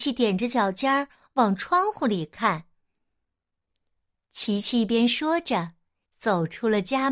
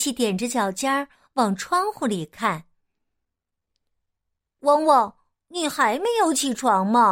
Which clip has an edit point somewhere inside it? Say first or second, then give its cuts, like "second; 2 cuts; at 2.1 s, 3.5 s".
first; 2 cuts; at 4.1 s, 6.1 s